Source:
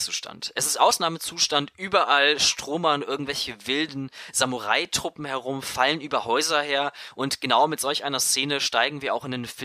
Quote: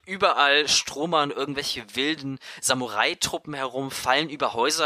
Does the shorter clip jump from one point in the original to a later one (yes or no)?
no